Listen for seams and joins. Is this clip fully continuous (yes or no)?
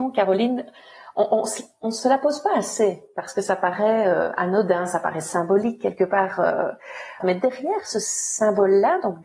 no